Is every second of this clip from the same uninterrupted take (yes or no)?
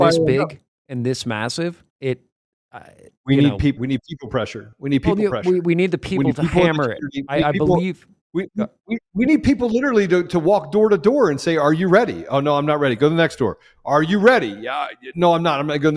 no